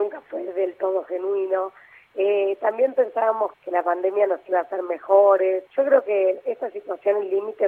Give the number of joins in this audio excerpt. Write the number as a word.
two